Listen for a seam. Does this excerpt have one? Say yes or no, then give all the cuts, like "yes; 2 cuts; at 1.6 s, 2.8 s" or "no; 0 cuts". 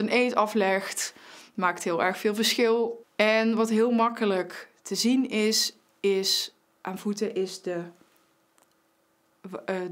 yes; 1 cut; at 3.0 s